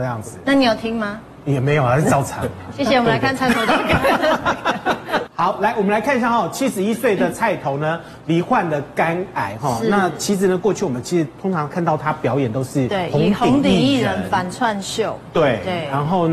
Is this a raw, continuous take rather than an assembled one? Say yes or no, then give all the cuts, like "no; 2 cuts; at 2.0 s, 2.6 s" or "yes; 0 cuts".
yes; 0 cuts